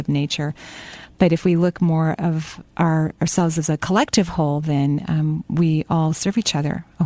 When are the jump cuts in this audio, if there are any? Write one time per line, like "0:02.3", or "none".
none